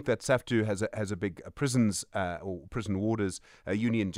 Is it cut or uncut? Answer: uncut